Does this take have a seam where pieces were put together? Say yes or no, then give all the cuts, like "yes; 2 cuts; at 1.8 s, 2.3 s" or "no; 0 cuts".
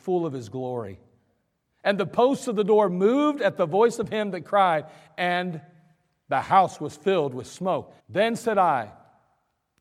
yes; 1 cut; at 8.0 s